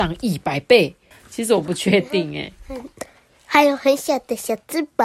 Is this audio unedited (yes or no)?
no